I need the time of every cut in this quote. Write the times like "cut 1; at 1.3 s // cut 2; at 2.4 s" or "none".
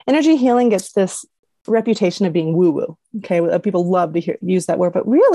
cut 1; at 4.4 s